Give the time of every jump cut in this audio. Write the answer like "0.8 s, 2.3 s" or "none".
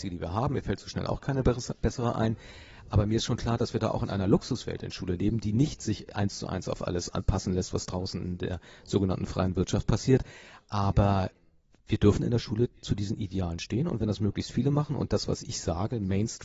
none